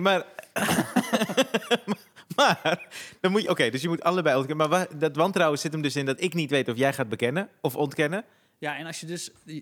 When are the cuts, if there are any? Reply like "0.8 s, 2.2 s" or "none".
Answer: 8.6 s